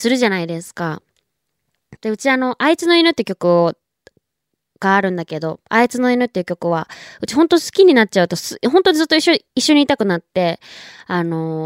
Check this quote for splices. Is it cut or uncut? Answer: cut